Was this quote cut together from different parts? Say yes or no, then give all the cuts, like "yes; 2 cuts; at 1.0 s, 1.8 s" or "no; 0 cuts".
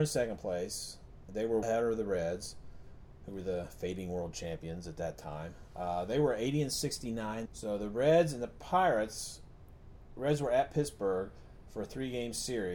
yes; 2 cuts; at 1.6 s, 7.5 s